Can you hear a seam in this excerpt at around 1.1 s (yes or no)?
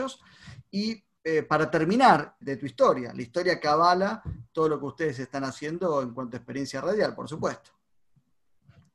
no